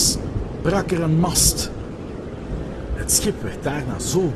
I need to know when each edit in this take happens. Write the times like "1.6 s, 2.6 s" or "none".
none